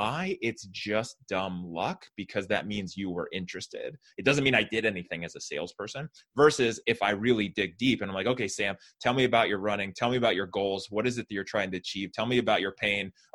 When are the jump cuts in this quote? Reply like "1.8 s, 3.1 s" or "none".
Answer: none